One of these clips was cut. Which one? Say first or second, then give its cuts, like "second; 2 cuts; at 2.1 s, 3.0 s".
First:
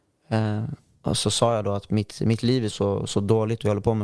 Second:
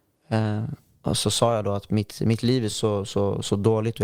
first; 1 cut; at 2.7 s